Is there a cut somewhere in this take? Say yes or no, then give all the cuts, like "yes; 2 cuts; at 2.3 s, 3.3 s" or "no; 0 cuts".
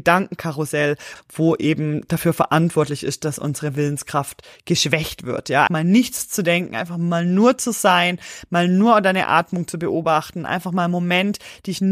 yes; 2 cuts; at 1.2 s, 5.7 s